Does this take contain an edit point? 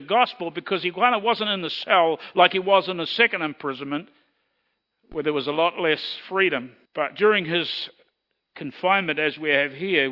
yes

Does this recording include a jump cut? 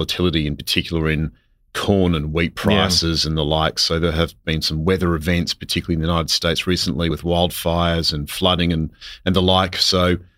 no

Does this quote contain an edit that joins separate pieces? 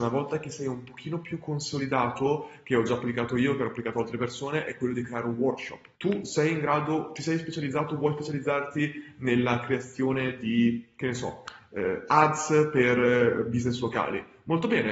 yes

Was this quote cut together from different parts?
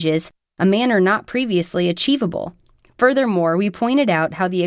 no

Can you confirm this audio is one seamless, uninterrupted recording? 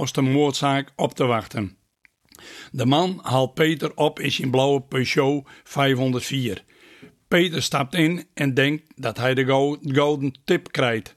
yes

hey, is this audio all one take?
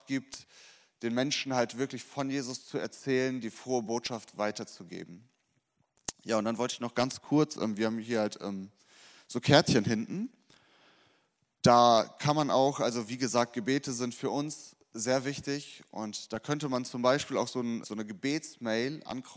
no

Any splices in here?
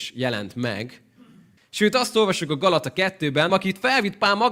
yes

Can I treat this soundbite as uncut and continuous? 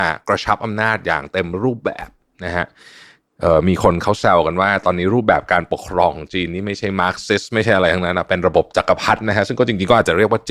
yes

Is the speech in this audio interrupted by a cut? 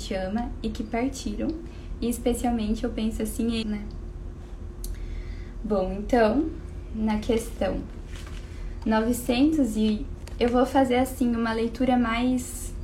yes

